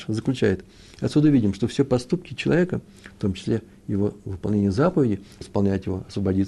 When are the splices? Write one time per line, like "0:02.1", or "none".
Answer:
0:05.4